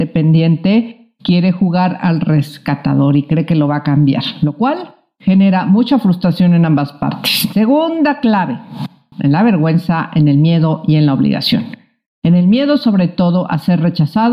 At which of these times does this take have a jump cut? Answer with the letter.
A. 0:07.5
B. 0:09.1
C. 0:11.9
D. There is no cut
B